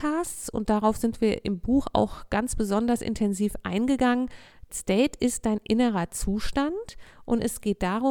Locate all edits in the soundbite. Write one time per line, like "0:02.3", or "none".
0:04.7